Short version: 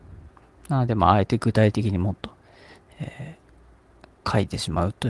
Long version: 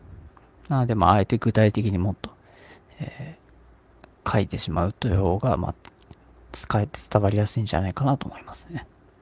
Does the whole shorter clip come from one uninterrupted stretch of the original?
yes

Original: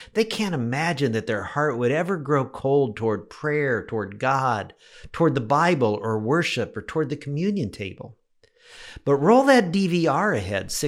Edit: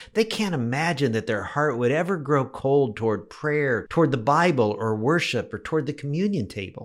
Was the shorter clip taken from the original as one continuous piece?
no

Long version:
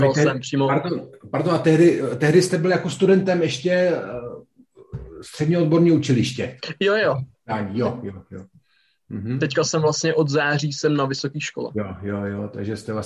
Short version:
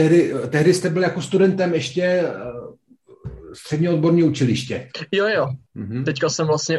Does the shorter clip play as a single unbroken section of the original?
no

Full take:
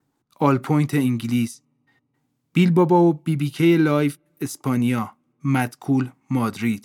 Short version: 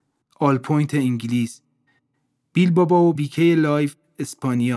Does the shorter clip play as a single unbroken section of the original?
no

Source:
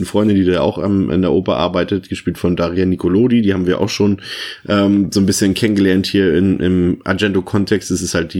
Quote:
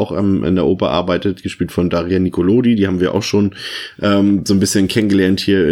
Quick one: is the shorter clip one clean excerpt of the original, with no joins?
yes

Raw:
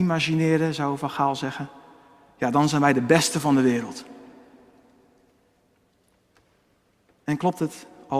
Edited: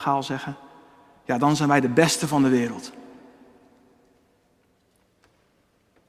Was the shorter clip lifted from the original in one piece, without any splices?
yes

